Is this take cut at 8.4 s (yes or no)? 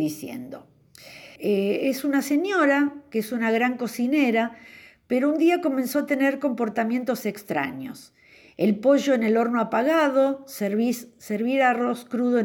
no